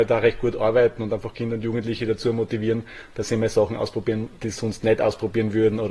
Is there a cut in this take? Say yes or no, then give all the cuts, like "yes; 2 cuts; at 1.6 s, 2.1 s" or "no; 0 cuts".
no; 0 cuts